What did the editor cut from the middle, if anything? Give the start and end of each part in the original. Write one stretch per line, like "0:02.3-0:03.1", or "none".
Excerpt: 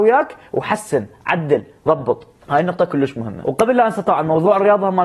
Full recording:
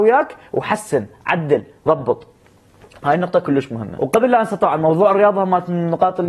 0:02.4-0:03.0